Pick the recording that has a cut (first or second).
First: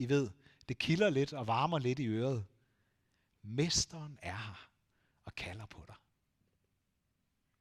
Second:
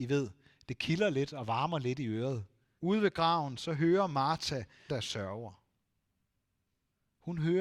second